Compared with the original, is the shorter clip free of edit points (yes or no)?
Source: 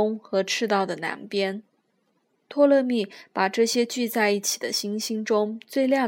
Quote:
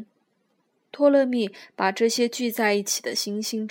yes